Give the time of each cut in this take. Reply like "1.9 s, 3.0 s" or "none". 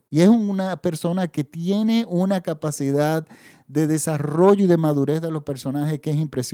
none